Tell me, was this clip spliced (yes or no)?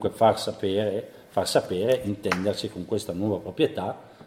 no